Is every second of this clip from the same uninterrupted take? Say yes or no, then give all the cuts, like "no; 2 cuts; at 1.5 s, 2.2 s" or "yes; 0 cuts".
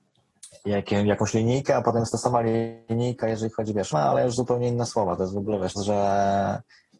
no; 2 cuts; at 3.9 s, 5.8 s